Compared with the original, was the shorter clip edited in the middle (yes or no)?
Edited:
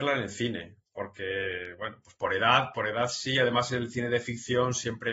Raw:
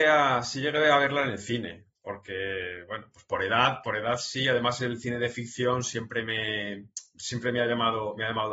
no